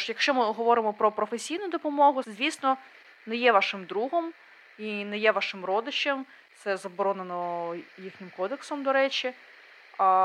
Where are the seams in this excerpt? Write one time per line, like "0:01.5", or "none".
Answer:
0:02.2